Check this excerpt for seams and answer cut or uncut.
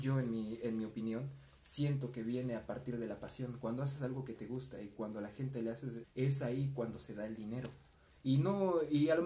cut